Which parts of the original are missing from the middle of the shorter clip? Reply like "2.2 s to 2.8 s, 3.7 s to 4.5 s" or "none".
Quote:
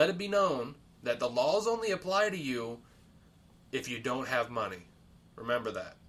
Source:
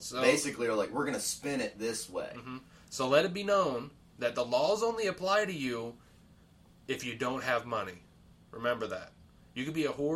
none